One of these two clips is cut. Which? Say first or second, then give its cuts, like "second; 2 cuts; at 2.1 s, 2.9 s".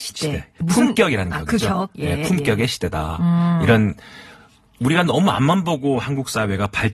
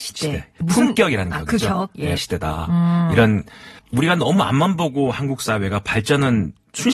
second; 2 cuts; at 2.2 s, 3.8 s